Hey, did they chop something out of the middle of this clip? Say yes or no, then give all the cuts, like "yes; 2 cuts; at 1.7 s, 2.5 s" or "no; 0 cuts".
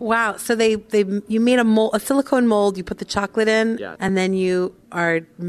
no; 0 cuts